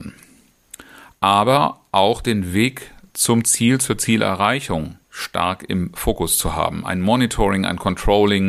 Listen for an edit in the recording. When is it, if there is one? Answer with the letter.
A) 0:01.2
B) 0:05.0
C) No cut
B